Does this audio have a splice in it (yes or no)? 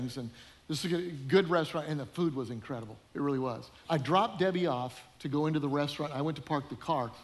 yes